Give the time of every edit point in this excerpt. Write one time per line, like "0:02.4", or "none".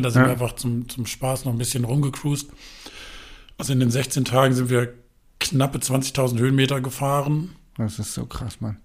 none